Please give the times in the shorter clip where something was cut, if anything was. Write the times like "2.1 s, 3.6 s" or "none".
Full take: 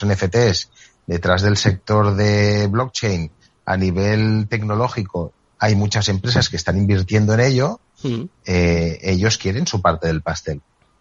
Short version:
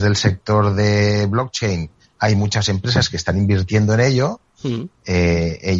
2.2 s